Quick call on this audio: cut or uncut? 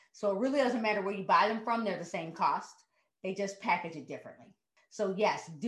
cut